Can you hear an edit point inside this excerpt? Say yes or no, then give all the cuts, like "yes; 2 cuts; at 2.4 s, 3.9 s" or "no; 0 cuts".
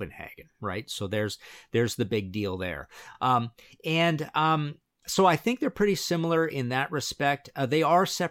no; 0 cuts